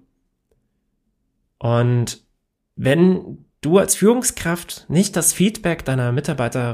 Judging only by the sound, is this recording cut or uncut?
uncut